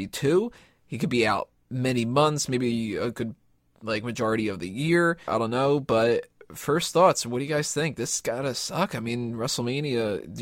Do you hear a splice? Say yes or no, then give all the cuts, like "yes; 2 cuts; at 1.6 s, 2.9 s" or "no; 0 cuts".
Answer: yes; 1 cut; at 5.3 s